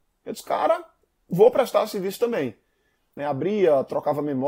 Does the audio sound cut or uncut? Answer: cut